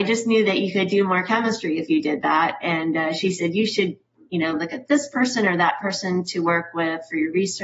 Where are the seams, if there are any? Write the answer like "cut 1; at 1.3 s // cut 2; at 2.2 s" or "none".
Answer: none